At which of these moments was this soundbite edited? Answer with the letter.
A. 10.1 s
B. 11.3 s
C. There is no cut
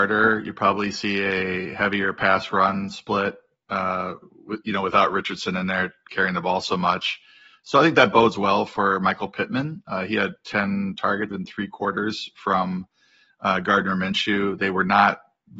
B